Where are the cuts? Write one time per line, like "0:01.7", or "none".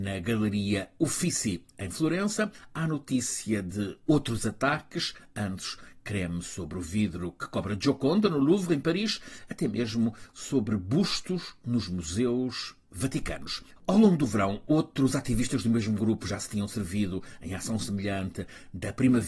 0:13.8